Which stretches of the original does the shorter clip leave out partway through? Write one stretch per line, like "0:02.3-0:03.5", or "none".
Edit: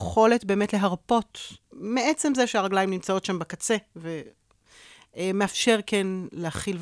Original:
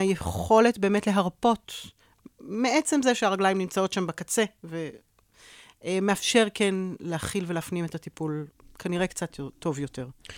0:02.0-0:02.3